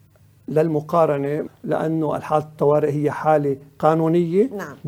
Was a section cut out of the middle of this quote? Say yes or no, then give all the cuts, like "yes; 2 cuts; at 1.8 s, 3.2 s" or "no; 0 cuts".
yes; 1 cut; at 1.5 s